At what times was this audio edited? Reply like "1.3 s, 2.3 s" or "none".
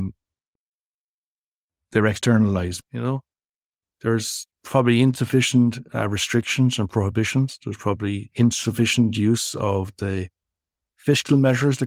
2.8 s, 4.5 s